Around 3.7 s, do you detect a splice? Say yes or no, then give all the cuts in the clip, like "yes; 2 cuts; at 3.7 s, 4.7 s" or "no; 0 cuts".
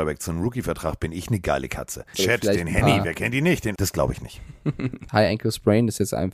yes; 3 cuts; at 2.1 s, 3.7 s, 5.1 s